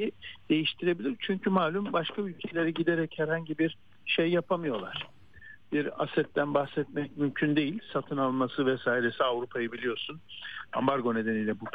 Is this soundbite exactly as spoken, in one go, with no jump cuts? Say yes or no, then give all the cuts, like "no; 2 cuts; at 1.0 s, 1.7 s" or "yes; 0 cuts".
yes; 0 cuts